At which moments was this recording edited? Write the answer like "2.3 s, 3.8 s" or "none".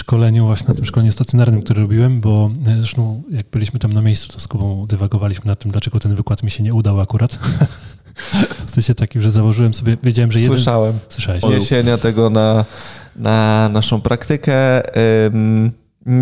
11.4 s